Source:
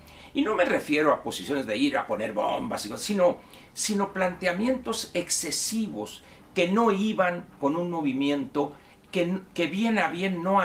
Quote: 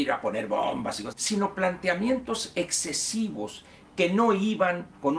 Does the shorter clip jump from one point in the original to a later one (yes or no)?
yes